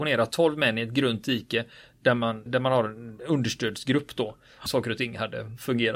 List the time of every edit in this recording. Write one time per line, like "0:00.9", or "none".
0:02.5
0:04.7